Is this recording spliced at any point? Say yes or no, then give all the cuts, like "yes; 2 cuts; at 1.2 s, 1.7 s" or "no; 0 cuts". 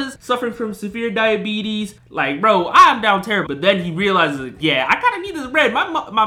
yes; 3 cuts; at 2.0 s, 3.4 s, 4.6 s